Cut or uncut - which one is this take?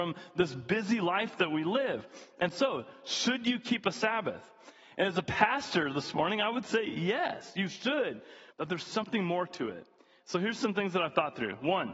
cut